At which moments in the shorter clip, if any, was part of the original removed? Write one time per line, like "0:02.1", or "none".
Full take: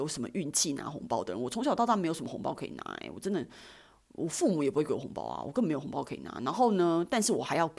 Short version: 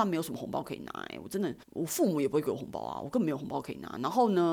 0:01.6